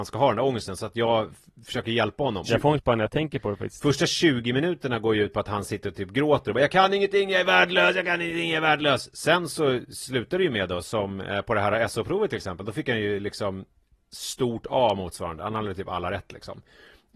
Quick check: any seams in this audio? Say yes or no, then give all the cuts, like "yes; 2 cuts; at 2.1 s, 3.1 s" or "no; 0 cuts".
yes; 1 cut; at 2.5 s